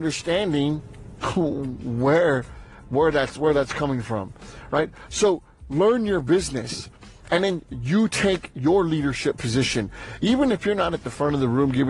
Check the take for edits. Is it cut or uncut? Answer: uncut